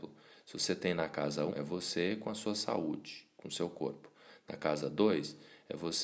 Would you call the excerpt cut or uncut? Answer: cut